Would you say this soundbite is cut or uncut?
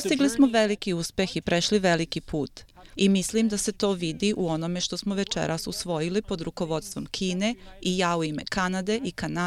cut